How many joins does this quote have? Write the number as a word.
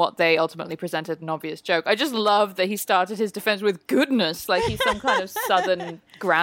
zero